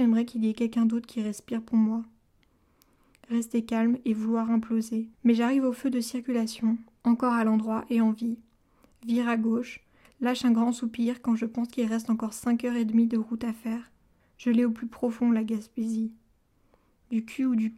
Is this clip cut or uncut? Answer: cut